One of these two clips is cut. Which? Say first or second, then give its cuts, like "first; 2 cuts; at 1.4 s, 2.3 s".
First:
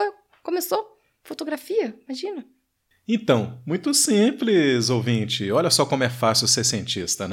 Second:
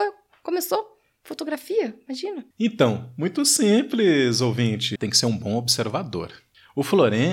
second; 2 cuts; at 2.5 s, 5.0 s